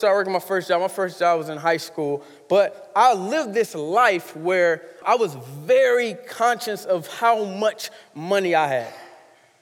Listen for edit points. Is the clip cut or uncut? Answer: cut